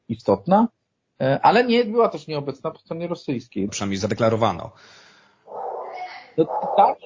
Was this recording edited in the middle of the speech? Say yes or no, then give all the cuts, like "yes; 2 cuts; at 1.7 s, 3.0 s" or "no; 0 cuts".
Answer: yes; 1 cut; at 3.7 s